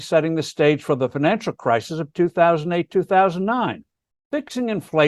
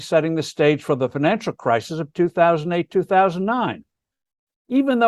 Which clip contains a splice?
first; 1 cut; at 4.1 s

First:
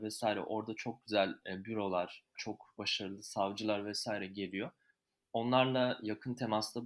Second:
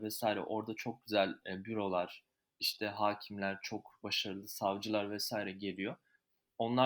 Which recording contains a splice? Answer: first; 1 cut; at 2.3 s

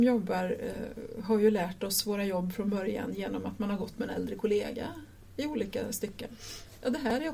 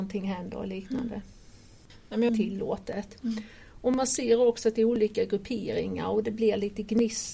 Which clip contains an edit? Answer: second; 1 cut; at 2.3 s

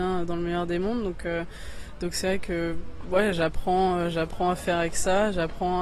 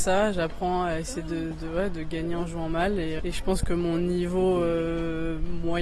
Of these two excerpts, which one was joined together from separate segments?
second; 1 cut; at 3.2 s

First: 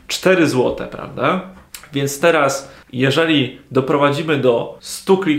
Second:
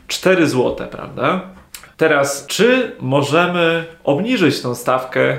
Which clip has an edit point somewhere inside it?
second; 1 cut; at 1.9 s

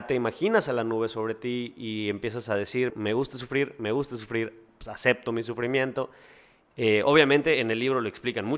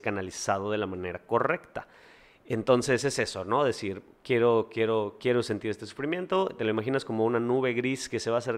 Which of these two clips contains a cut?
first; 2 cuts; at 2.9 s, 6.7 s

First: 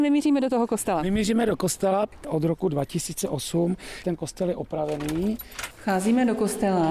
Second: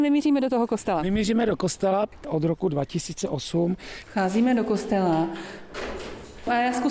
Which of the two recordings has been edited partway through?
second; 1 cut; at 4.0 s

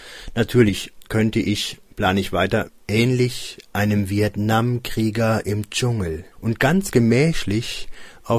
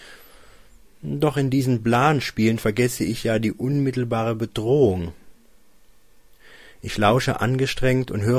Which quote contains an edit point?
first; 2 cuts; at 2.7 s, 6.3 s

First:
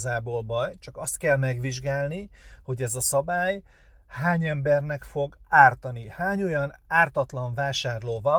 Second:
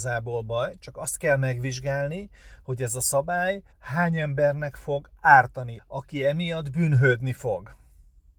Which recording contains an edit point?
second; 2 cuts; at 3.7 s, 5.8 s

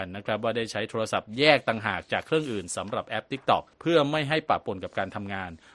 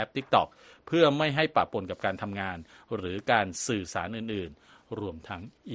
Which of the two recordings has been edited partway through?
first; 1 cut; at 3.7 s

